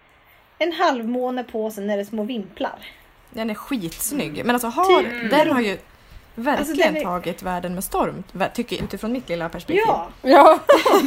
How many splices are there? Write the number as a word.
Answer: one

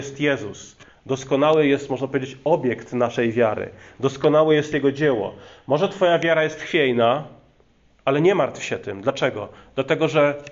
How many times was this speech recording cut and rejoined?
zero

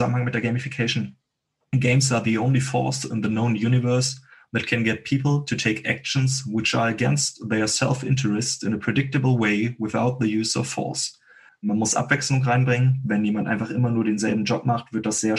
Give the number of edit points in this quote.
one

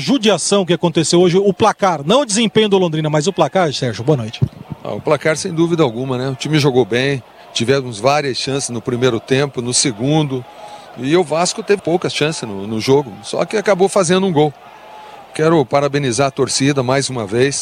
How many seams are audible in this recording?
one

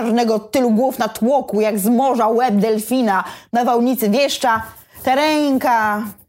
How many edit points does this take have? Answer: zero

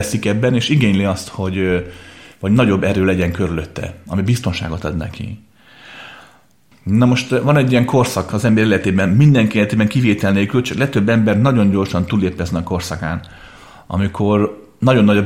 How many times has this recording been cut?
one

